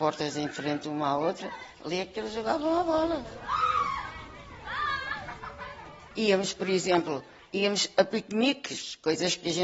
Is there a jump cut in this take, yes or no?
no